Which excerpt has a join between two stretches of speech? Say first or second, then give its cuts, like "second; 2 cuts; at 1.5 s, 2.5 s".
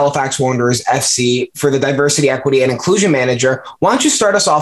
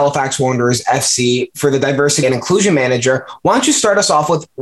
second; 1 cut; at 2.2 s